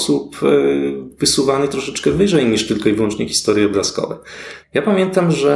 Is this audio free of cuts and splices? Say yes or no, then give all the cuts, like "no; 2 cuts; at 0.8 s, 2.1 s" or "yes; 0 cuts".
no; 1 cut; at 4.6 s